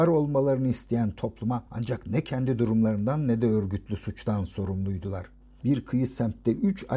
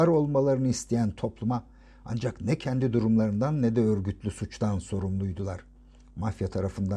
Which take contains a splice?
first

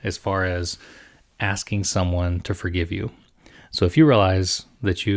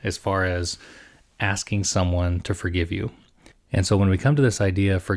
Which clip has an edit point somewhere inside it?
second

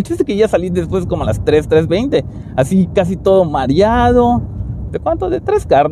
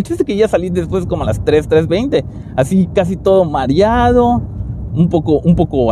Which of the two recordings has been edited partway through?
first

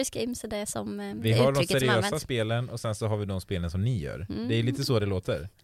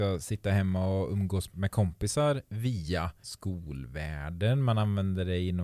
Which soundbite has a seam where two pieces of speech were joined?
second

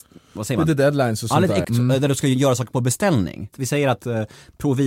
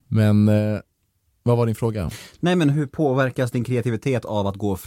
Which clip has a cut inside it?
first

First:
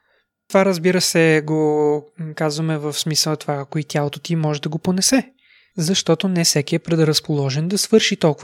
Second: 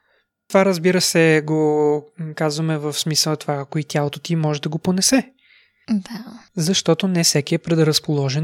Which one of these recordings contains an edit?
first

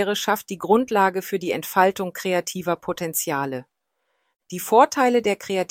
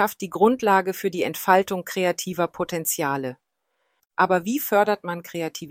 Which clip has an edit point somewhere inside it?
second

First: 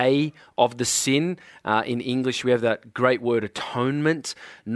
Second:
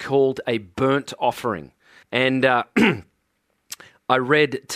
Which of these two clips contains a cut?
second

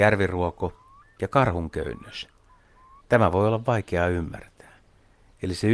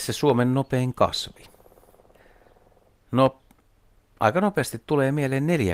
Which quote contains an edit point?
first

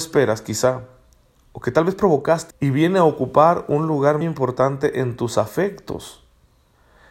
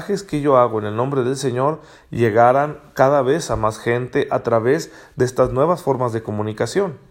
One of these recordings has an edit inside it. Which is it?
first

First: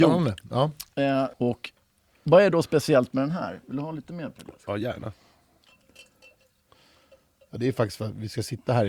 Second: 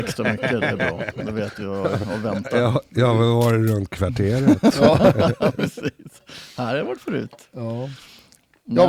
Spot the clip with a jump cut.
first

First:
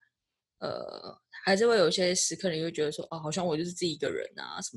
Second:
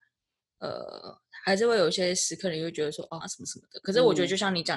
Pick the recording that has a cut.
second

